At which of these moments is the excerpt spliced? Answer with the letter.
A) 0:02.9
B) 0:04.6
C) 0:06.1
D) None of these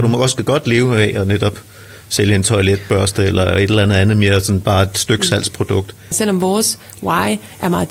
C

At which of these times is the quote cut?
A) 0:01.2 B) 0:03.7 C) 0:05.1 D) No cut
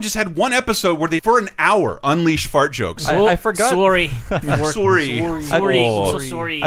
A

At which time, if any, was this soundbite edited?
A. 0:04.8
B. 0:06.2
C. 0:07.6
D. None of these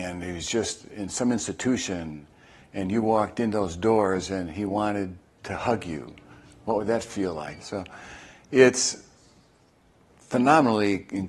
C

